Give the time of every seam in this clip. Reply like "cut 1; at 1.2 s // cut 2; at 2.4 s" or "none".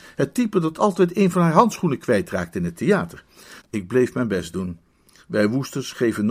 cut 1; at 3.6 s

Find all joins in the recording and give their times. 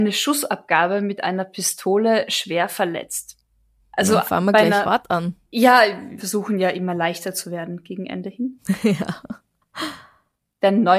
cut 1; at 3.8 s // cut 2; at 6.2 s

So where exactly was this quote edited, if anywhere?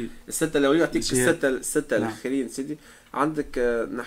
none

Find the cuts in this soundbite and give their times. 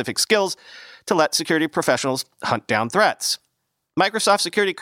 none

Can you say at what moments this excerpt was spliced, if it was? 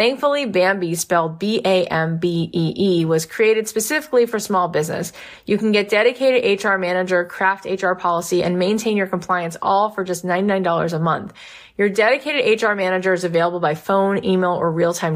none

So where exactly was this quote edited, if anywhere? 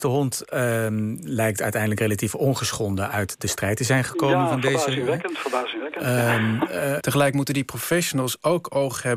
cut 1; at 7.0 s

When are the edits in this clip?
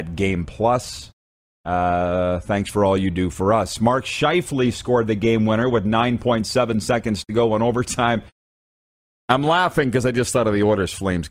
none

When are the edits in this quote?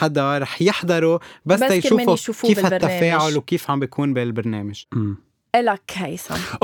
none

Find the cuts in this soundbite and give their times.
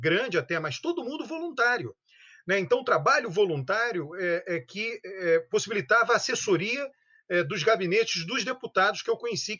none

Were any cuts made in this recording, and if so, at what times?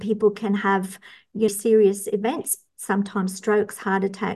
cut 1; at 1.5 s

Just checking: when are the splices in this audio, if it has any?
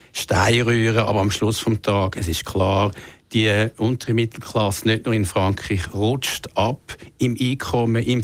none

